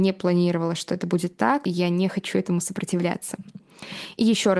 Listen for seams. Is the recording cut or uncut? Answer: cut